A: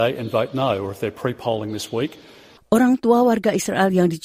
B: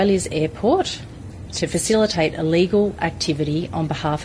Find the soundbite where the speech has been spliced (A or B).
A